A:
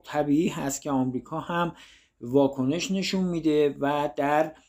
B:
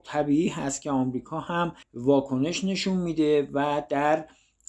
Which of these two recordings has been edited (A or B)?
B